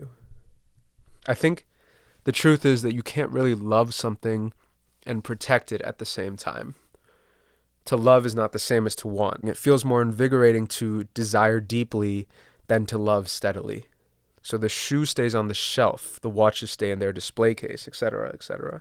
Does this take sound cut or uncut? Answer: cut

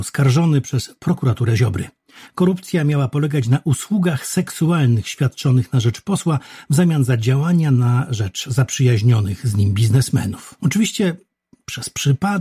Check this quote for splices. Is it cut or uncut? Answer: cut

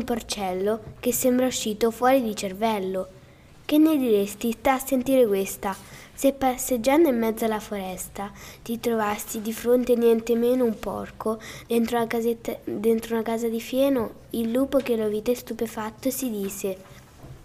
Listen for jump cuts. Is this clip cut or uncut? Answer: uncut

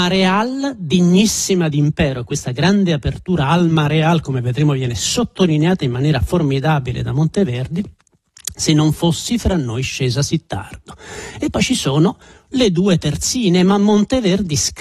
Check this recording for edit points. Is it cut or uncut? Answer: uncut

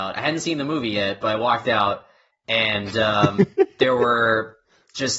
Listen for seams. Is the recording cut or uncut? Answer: uncut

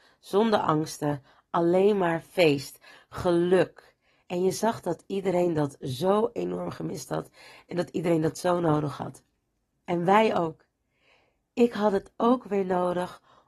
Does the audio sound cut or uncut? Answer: uncut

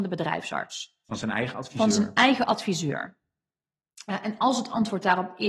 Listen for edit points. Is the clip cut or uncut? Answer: uncut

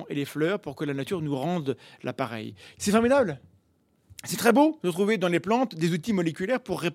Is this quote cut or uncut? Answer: cut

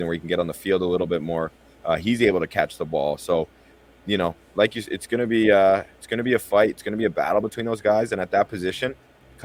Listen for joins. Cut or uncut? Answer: uncut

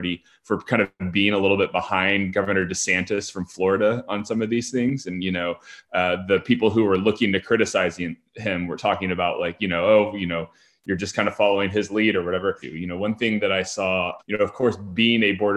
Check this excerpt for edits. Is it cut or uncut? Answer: cut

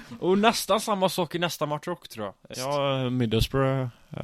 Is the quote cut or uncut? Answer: cut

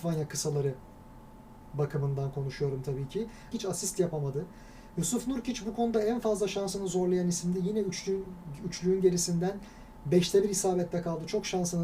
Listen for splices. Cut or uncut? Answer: cut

